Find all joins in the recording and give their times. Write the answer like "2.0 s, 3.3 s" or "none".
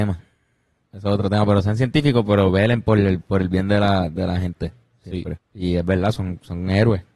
5.4 s